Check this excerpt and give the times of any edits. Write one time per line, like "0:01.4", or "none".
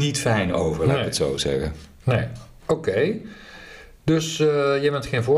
none